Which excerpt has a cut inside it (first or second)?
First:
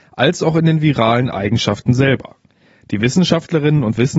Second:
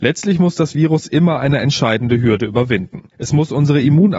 second